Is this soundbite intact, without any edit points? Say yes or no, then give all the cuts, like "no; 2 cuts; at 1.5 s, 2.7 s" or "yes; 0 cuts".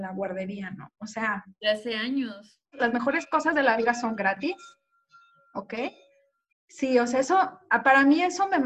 no; 2 cuts; at 2.7 s, 6.5 s